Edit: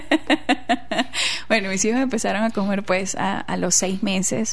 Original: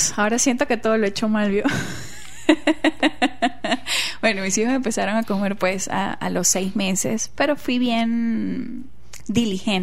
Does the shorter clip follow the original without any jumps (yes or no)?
yes